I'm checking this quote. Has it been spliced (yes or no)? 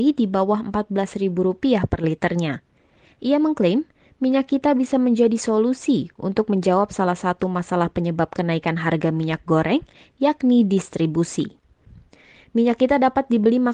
no